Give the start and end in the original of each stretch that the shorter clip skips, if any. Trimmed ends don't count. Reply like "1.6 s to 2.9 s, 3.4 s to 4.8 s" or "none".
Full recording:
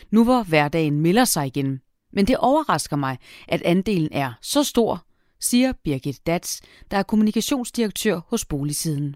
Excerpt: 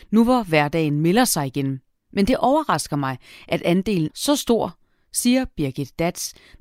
4.1 s to 4.4 s

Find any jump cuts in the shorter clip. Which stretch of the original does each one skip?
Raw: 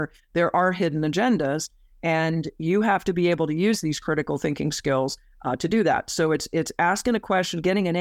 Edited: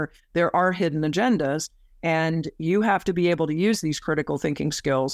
none

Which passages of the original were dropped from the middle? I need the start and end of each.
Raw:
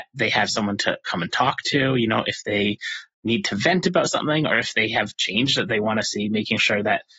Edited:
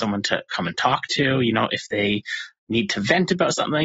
none

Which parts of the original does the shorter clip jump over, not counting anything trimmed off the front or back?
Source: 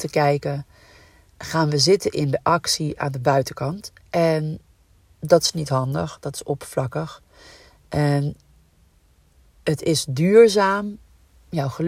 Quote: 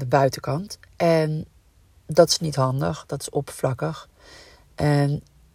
none

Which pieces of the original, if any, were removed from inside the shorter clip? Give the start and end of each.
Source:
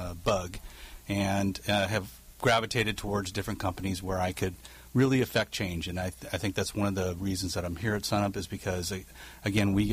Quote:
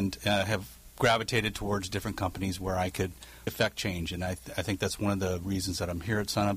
4.9 s to 5.2 s

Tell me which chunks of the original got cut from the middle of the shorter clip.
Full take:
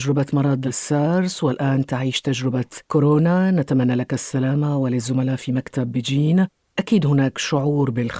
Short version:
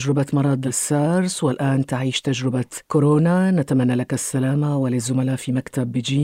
none

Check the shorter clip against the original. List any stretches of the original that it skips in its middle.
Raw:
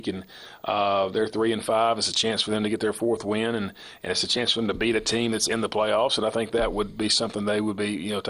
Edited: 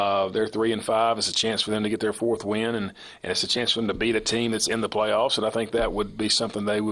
none

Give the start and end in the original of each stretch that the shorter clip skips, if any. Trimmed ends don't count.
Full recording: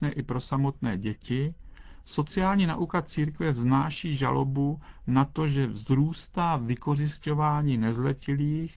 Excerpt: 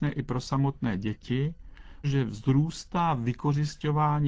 2.0 s to 5.5 s

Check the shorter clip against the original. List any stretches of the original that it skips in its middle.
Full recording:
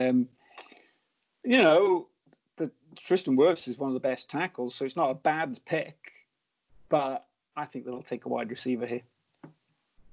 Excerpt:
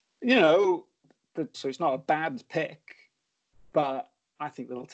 2.8 s to 4.7 s

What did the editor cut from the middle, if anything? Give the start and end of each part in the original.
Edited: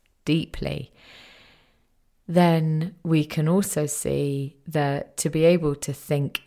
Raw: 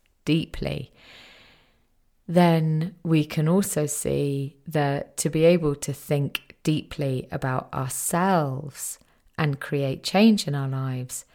none

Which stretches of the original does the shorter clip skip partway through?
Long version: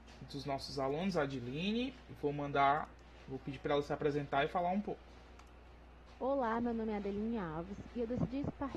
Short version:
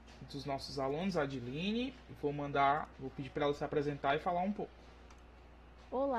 2.9 s to 3.2 s

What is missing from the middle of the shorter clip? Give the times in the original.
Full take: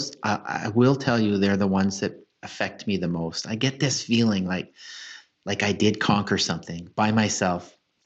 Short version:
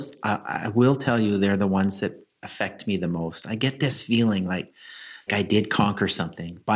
5.3 s to 5.6 s

